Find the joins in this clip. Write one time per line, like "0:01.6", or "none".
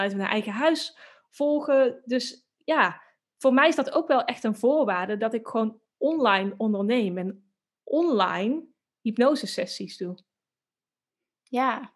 none